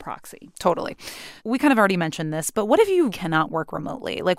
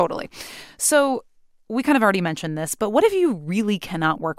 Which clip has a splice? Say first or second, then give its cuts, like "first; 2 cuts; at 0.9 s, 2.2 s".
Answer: first; 2 cuts; at 1.4 s, 3.1 s